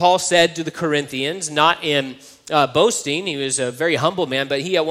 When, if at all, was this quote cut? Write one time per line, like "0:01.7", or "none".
none

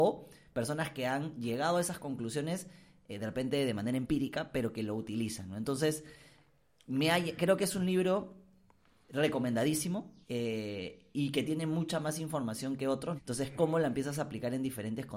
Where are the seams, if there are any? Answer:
0:10.2
0:13.2

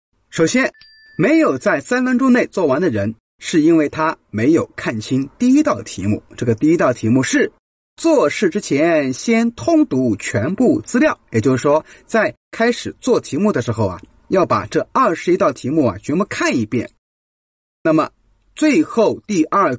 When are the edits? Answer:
none

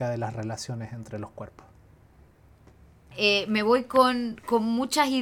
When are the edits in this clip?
0:03.1

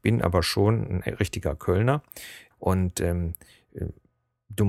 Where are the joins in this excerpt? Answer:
0:02.5

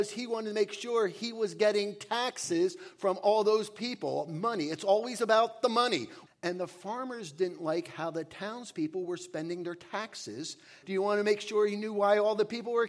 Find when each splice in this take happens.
0:06.3
0:10.8

